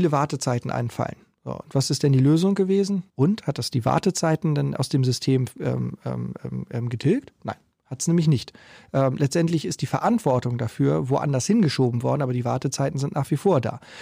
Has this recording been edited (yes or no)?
yes